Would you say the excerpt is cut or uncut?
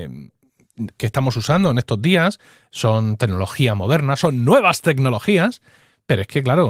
cut